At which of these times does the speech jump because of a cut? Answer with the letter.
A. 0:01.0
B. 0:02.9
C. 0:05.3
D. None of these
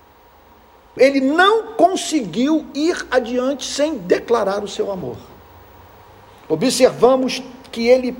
A